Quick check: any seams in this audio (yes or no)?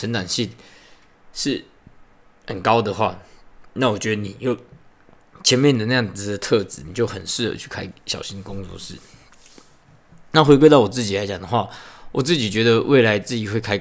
no